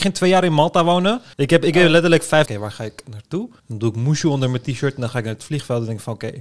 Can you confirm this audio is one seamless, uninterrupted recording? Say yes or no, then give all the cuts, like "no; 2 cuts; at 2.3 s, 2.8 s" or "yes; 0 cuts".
no; 3 cuts; at 1.3 s, 2.5 s, 3.6 s